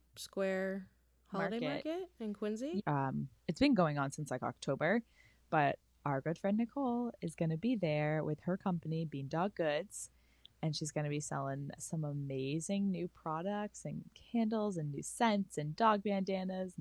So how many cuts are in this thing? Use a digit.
2